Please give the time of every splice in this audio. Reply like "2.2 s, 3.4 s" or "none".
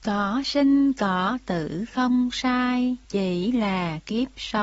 3.0 s